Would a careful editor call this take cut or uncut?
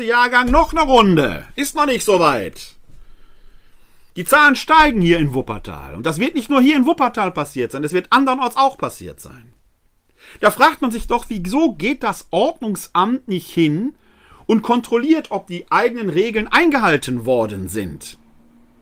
uncut